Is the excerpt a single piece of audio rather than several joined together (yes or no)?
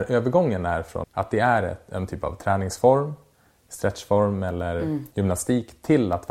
no